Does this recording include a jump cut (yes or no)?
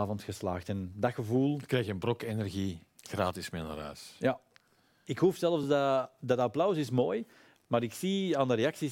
no